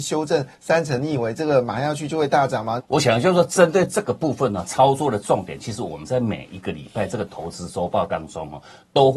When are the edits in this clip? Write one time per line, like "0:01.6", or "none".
0:02.8

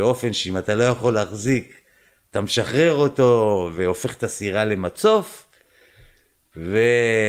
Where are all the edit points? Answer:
none

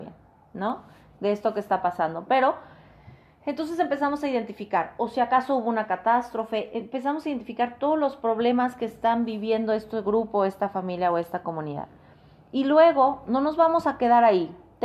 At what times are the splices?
none

